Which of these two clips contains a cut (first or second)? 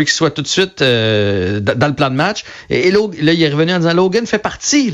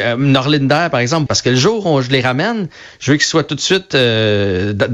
second